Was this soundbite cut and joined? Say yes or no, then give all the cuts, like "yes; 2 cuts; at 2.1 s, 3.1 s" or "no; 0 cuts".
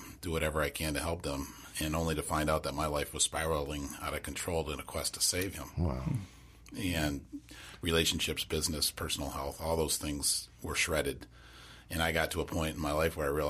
no; 0 cuts